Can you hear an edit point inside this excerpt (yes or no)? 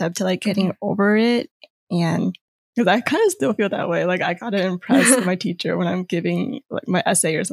no